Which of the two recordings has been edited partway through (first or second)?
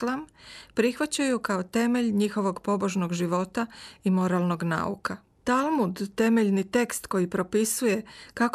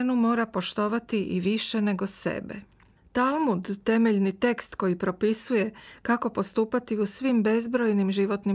first